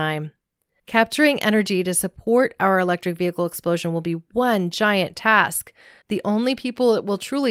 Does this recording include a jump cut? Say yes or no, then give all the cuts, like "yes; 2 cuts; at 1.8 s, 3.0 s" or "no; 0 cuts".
yes; 1 cut; at 6.0 s